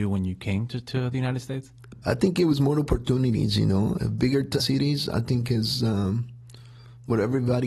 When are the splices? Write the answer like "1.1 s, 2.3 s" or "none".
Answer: 2.0 s, 4.6 s